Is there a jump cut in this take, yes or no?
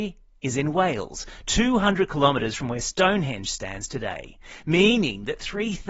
no